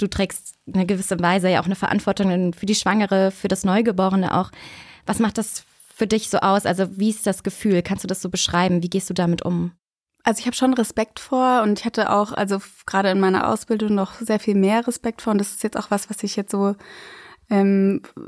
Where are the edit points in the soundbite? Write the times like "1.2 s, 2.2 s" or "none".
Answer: none

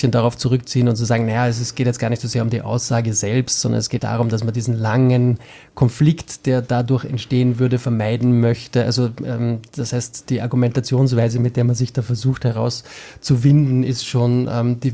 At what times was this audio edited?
4.0 s

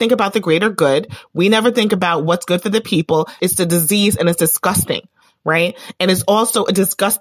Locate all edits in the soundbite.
3.4 s

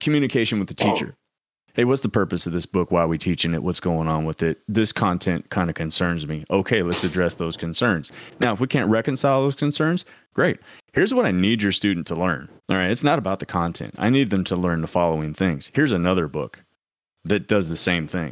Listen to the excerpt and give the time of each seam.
12.6 s

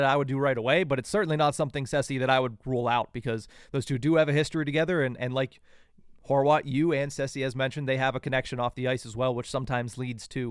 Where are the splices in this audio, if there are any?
none

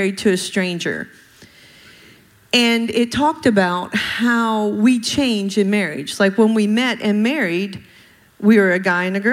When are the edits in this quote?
none

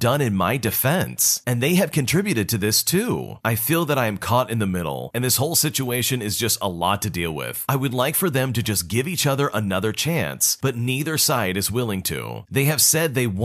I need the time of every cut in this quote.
12.4 s

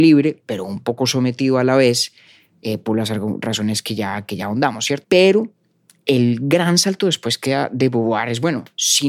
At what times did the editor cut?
5.0 s

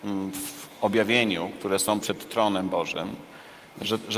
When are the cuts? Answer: 2.0 s

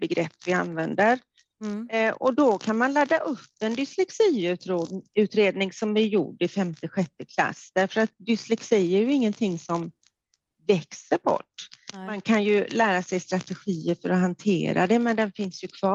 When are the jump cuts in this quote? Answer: none

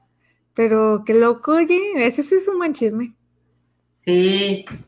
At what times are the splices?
none

